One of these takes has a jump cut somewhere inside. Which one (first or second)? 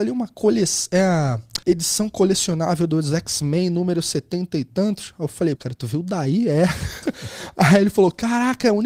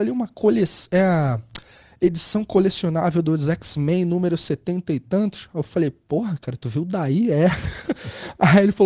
first